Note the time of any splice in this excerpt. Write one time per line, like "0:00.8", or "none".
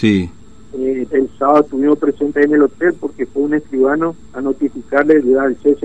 0:01.1
0:04.2